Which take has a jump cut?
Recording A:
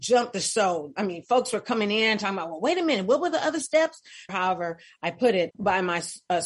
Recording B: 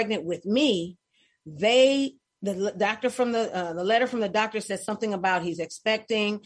A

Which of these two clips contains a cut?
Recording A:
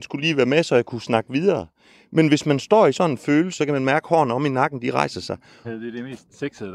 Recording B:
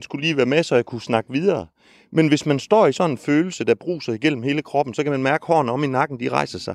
A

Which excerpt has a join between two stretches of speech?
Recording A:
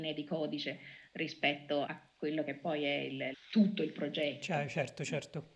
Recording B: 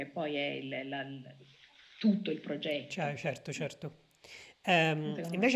A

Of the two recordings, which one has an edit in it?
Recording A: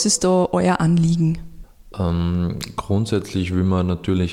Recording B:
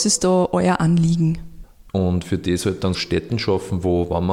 B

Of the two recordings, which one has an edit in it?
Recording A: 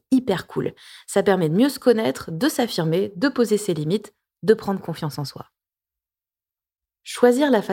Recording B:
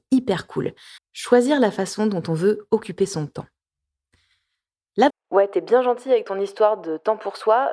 B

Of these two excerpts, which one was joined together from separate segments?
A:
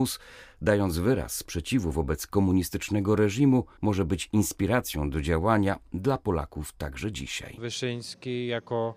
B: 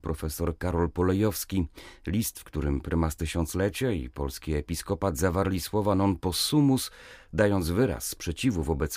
A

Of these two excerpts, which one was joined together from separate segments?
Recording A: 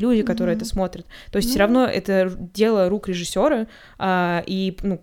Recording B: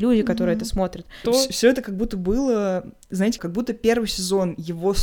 B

